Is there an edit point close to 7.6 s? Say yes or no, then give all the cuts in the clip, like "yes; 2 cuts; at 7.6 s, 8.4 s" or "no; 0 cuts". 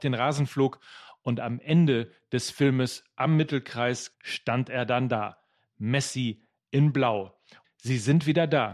yes; 2 cuts; at 4.1 s, 7.6 s